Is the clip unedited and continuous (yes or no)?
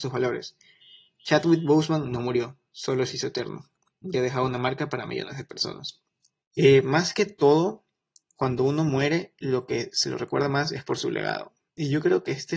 no